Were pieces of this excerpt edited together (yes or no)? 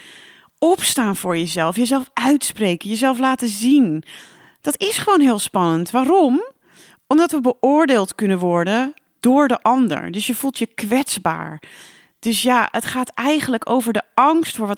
no